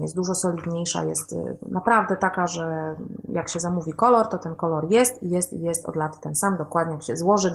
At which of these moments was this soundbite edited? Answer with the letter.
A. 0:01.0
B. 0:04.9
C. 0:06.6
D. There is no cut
D